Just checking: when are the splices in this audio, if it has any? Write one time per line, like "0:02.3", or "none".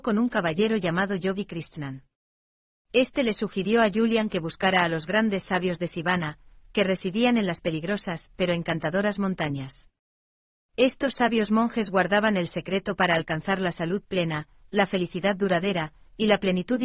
none